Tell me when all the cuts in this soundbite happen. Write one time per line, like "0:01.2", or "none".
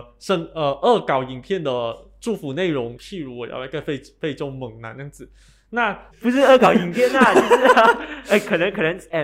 0:03.0
0:06.1